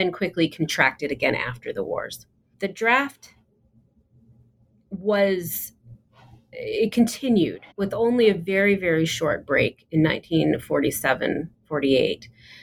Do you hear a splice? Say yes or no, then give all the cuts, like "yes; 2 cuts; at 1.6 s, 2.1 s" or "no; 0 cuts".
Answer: yes; 3 cuts; at 2.5 s, 6.5 s, 7.7 s